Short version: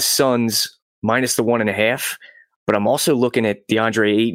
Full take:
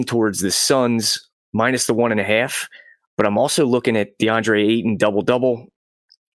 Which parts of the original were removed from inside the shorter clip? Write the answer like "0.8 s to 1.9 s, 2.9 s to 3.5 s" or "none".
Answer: none